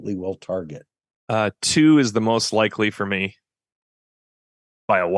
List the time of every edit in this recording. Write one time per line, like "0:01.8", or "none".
none